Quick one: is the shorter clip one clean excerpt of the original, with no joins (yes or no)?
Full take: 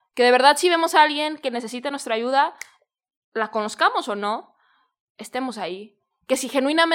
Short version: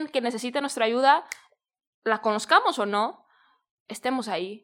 yes